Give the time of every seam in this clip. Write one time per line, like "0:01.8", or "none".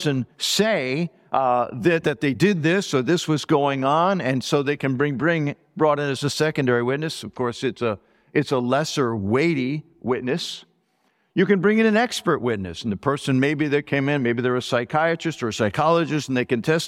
0:02.0